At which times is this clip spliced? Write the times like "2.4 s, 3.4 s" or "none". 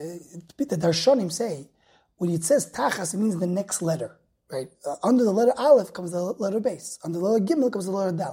none